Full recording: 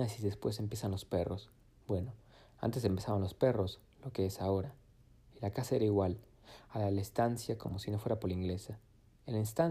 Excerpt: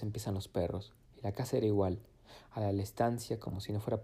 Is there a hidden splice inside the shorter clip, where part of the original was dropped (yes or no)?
yes